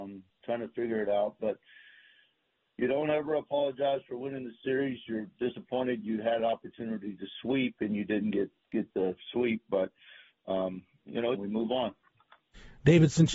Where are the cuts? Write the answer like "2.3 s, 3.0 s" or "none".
11.3 s